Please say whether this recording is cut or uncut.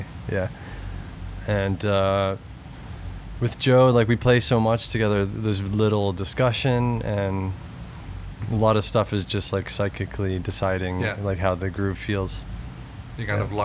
uncut